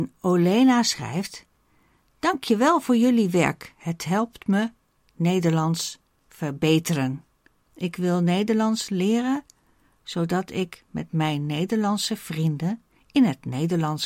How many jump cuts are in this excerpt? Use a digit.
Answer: 1